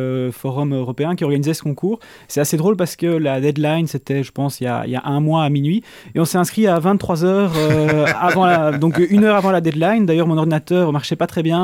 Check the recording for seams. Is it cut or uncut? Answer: uncut